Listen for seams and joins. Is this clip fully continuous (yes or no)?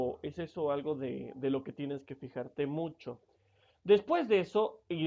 yes